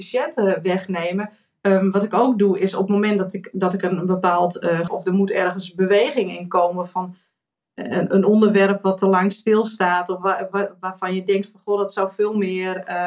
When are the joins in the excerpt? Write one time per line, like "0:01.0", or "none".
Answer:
0:01.6
0:04.9